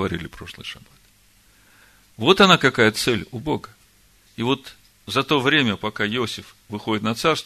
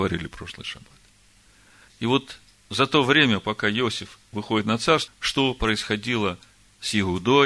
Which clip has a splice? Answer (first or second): second